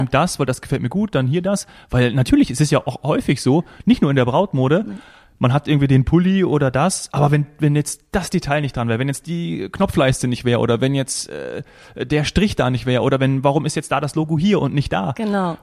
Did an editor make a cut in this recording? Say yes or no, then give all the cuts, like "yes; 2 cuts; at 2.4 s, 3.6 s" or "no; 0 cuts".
no; 0 cuts